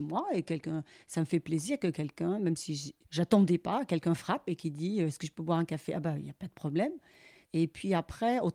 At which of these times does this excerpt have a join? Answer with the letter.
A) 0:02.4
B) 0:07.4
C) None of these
B